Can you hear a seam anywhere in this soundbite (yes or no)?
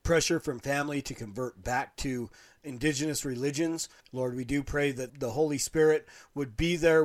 yes